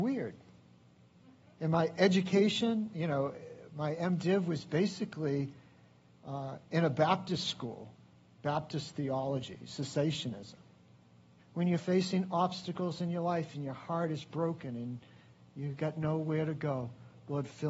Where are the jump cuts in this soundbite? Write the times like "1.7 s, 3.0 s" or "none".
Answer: 11.4 s